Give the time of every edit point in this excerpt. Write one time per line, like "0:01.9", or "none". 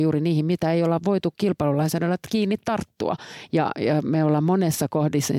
none